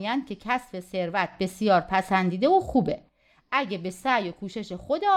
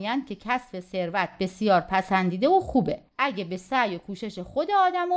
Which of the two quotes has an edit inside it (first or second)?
second